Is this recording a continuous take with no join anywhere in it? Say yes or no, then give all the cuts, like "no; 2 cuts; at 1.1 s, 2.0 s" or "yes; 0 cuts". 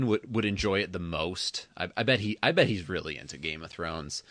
yes; 0 cuts